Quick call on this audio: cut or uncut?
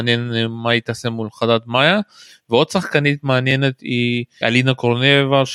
cut